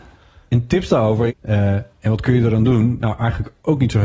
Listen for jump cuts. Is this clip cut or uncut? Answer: cut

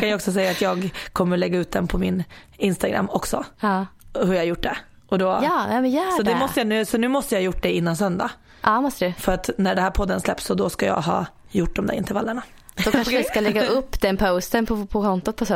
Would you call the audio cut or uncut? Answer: cut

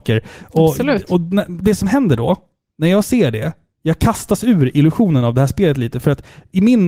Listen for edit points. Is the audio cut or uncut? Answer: uncut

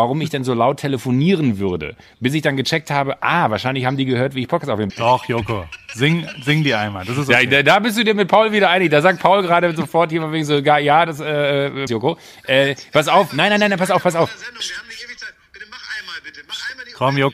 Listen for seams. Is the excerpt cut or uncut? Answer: cut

